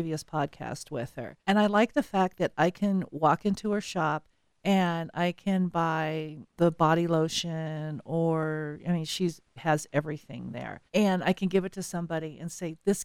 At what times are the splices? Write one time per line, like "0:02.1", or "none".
0:01.4
0:10.9